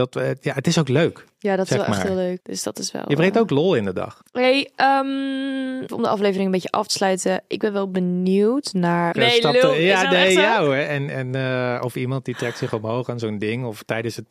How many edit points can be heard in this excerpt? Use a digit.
3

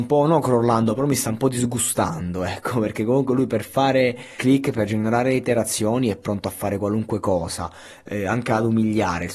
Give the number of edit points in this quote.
1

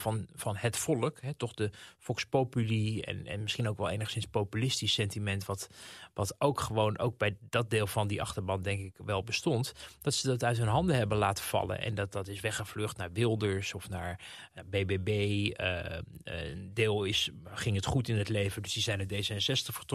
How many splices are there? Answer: 0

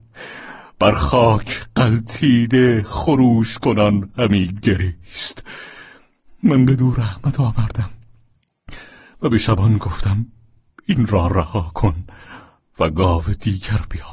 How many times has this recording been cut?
0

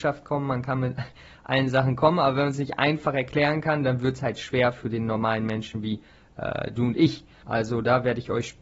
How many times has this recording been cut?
1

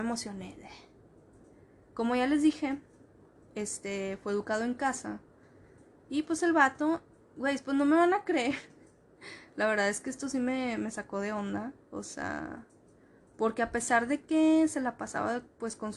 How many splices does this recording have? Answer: 0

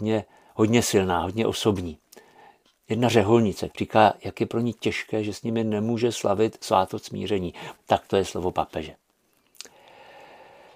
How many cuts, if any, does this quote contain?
2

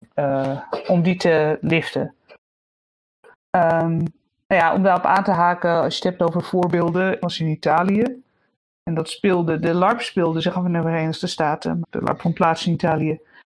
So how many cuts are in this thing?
2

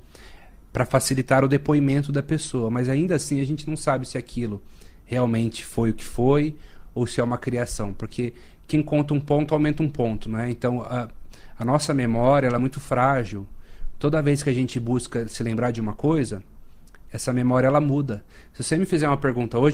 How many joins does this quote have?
0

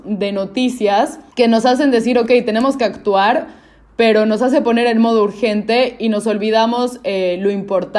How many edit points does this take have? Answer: 1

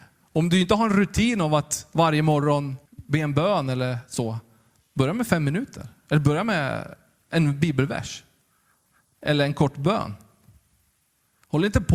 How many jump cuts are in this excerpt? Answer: 1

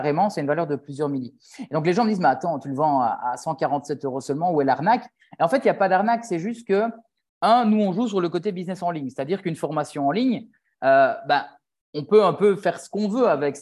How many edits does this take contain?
0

